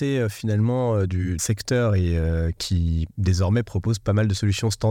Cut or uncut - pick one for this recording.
cut